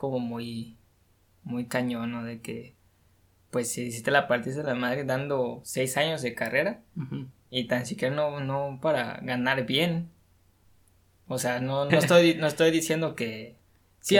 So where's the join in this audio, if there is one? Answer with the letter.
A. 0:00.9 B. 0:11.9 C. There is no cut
B